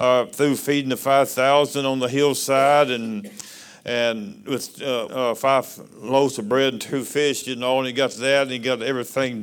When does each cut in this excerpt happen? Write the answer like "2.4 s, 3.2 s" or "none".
5.1 s, 7.4 s

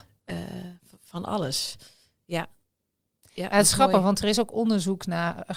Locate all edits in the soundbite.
none

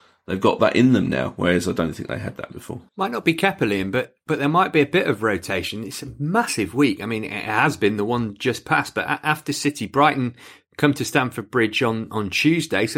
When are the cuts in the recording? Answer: 2.9 s

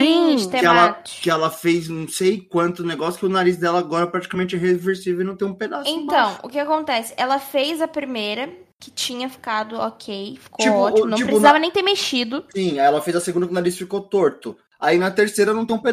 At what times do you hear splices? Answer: none

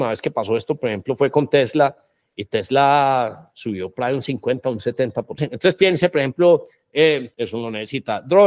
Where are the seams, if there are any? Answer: 5.4 s, 7.3 s

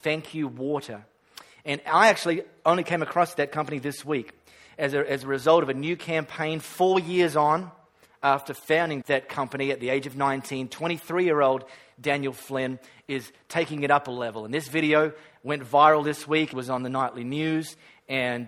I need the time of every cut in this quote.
9.0 s, 16.5 s

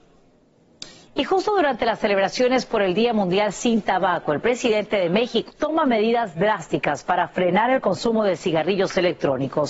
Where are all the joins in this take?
1.1 s, 5.5 s

